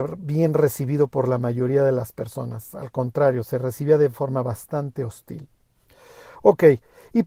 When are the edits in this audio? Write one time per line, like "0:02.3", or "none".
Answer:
none